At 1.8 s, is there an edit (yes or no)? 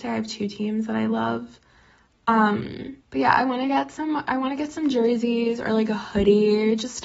no